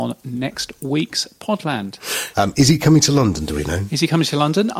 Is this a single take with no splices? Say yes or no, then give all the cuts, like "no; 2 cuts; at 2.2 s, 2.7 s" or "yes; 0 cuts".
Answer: no; 1 cut; at 2.3 s